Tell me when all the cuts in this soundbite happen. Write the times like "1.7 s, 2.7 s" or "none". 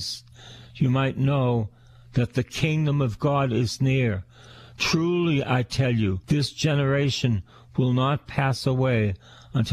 6.2 s